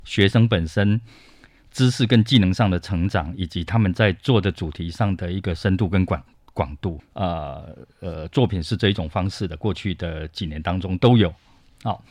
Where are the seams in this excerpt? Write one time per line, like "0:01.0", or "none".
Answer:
0:07.0